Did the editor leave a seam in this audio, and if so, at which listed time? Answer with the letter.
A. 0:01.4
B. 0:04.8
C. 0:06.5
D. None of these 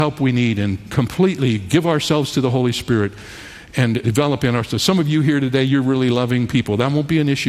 D